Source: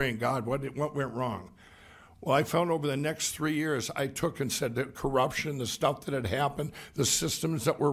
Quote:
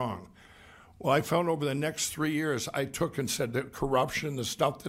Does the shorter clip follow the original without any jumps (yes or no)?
yes